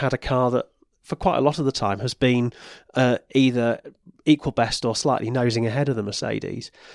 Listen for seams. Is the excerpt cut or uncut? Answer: uncut